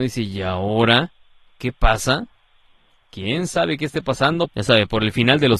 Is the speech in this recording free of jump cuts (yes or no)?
no